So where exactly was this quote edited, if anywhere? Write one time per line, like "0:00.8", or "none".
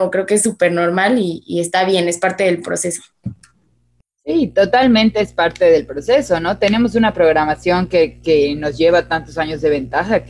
none